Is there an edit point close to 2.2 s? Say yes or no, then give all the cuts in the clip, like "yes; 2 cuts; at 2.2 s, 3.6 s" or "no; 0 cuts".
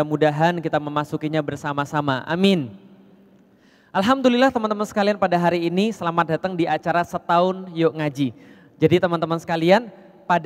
no; 0 cuts